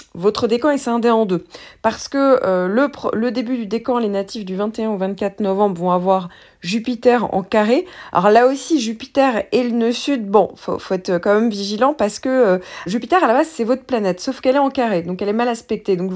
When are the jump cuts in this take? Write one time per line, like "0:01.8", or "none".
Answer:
0:12.9